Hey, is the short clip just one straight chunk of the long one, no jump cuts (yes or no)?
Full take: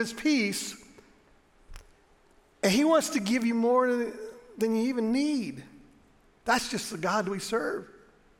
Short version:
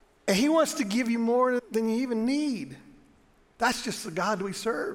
no